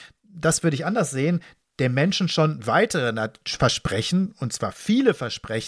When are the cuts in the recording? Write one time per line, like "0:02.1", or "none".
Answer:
none